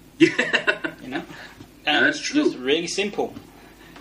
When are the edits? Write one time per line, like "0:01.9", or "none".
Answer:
none